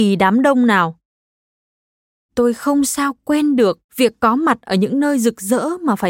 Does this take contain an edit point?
yes; 2 cuts; at 2.2 s, 3.8 s

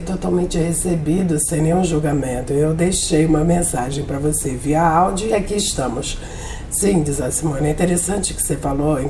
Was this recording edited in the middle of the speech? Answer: no; 0 cuts

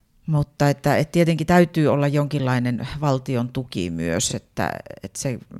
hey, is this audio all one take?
yes; 0 cuts

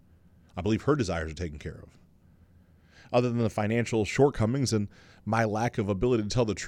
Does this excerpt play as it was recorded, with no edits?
yes; 0 cuts

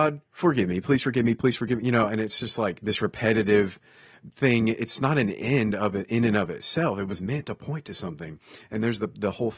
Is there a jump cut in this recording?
no; 0 cuts

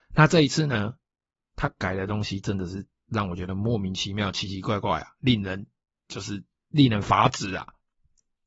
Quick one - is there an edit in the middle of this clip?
no; 0 cuts

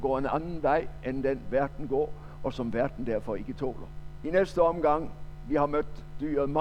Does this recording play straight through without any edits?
no; 1 cut; at 4.2 s

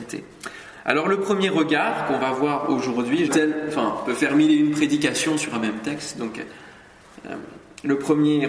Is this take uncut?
no; 1 cut; at 3.3 s

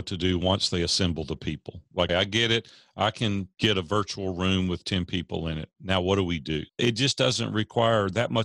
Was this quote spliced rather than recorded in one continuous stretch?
yes; 2 cuts; at 2.1 s, 6.7 s

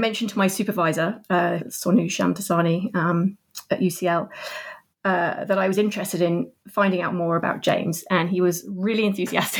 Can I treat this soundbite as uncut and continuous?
no; 1 cut; at 1.6 s

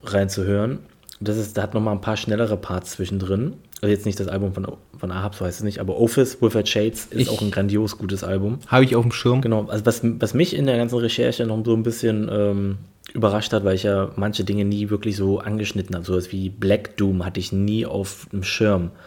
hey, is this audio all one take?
yes; 0 cuts

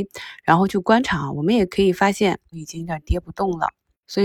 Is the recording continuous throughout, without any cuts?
no; 1 cut; at 2.5 s

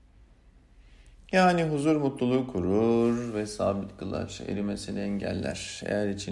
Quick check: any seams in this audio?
no; 0 cuts

